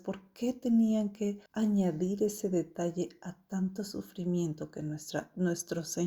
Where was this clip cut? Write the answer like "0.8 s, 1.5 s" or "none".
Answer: 1.5 s